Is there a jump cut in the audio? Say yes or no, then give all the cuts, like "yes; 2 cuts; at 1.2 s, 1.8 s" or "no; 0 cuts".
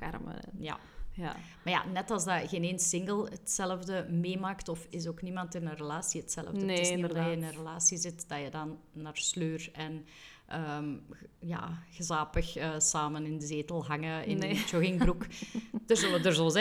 yes; 1 cut; at 4.9 s